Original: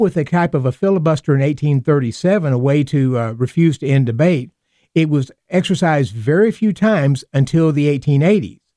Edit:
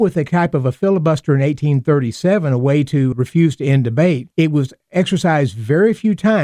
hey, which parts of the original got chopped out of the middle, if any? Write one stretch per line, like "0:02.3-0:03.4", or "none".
0:03.1-0:03.3
0:04.5-0:04.9